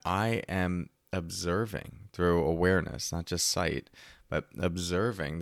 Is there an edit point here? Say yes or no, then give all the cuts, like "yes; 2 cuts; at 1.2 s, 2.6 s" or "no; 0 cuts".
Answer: no; 0 cuts